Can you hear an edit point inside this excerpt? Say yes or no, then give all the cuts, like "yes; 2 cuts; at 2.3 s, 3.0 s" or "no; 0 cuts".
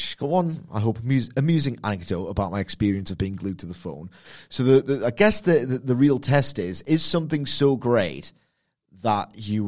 no; 0 cuts